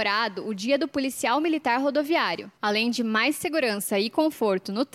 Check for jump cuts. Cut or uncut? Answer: cut